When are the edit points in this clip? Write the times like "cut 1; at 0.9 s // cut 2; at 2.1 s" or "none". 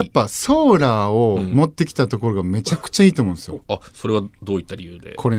none